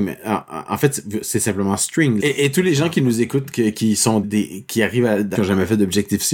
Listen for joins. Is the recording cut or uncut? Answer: cut